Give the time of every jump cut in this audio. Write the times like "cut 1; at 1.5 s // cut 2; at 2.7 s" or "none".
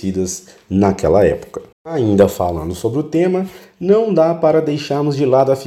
cut 1; at 1.7 s